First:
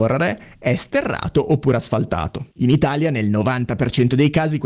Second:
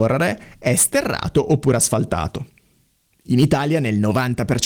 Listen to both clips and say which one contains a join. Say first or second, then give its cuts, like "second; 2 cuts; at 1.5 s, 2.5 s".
first; 1 cut; at 2.5 s